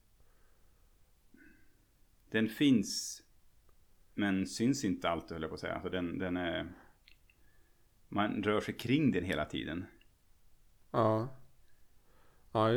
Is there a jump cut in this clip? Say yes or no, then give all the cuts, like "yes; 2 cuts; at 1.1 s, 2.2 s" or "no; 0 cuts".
no; 0 cuts